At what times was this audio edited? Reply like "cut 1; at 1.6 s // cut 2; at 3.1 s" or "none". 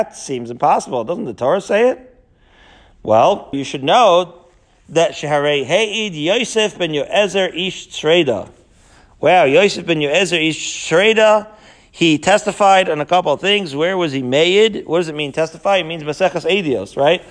cut 1; at 3.5 s